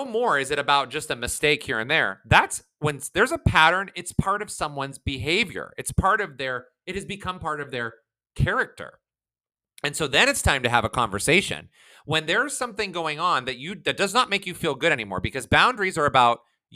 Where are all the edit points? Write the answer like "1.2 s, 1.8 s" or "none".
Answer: none